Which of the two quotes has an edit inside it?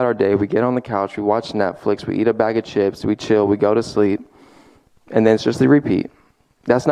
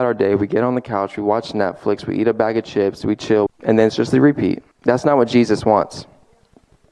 second; 2 cuts; at 3.5 s, 4.7 s

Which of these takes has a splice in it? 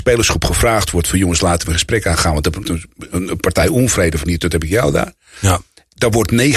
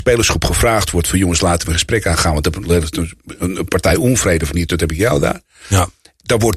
first; 1 cut; at 2.6 s

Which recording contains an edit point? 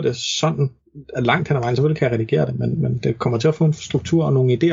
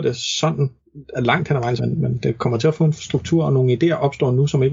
second; 1 cut; at 1.8 s

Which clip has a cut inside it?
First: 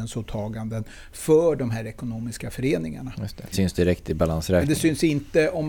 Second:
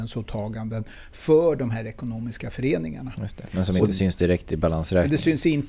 first; 1 cut; at 3.5 s

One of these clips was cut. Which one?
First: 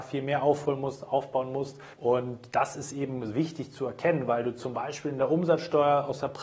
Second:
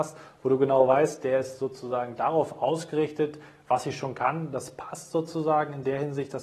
first; 1 cut; at 1.9 s

